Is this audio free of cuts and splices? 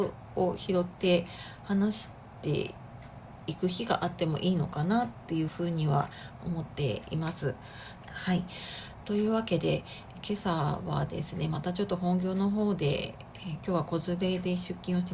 no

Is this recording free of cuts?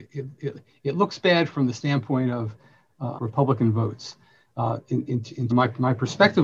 no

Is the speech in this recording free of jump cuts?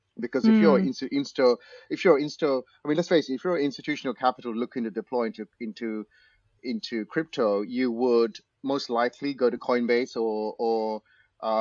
yes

